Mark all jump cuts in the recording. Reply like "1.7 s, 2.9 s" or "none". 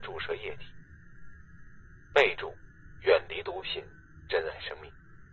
none